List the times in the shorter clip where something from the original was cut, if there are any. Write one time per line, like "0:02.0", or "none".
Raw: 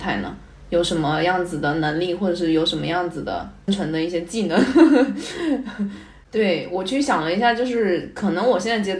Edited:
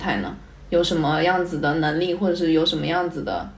none